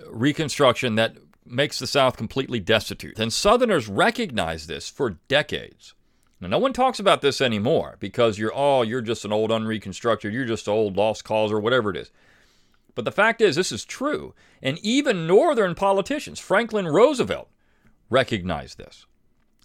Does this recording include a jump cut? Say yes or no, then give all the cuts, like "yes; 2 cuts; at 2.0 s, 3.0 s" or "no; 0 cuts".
yes; 1 cut; at 3.1 s